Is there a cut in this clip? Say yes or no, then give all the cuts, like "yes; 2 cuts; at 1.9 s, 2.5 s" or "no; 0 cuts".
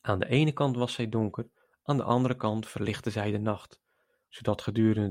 no; 0 cuts